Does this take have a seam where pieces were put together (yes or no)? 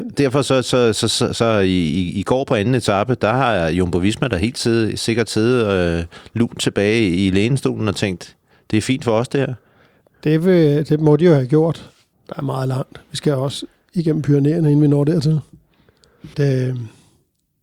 yes